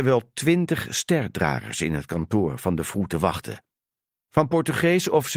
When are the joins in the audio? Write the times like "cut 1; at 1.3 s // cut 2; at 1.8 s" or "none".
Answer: cut 1; at 4.3 s